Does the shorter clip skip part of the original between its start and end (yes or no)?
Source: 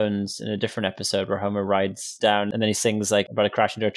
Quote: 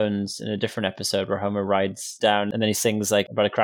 no